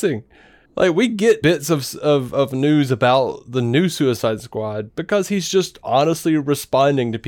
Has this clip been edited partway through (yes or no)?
yes